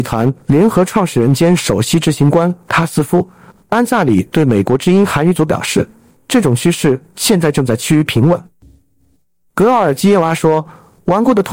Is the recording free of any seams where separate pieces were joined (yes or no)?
no